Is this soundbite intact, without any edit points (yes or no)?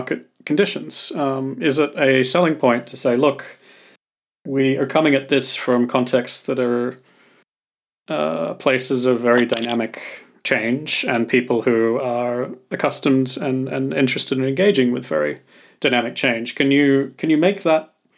yes